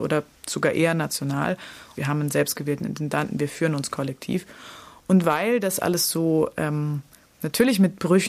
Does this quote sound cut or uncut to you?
cut